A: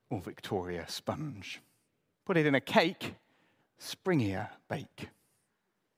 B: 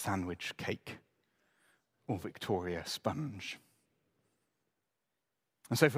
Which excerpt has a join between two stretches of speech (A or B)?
A